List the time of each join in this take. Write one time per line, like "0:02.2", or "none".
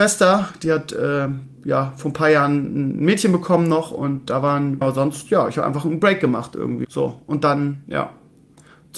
0:04.8
0:06.8